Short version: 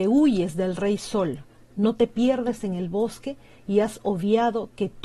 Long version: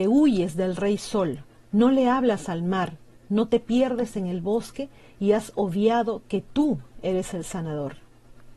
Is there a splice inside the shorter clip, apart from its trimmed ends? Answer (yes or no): yes